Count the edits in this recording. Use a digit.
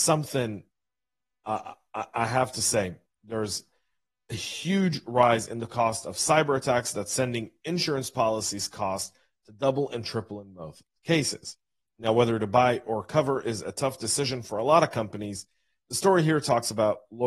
0